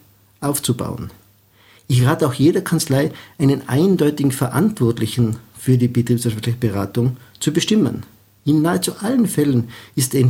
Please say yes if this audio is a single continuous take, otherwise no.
yes